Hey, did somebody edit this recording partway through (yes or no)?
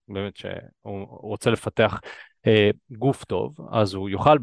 no